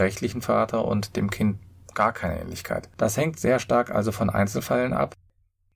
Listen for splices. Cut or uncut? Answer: uncut